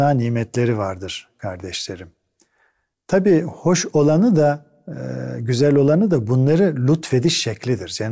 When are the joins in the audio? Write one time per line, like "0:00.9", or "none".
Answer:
none